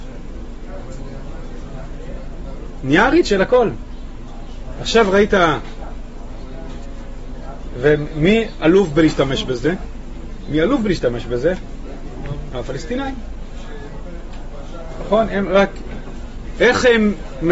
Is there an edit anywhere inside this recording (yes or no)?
no